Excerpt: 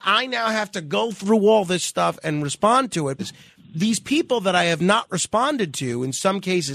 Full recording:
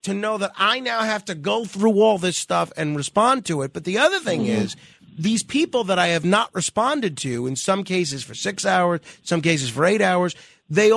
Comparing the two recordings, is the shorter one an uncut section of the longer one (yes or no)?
no